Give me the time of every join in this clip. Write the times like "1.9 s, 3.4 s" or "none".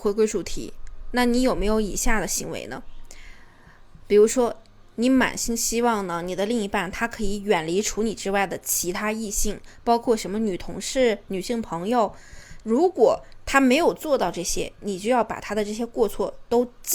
12.6 s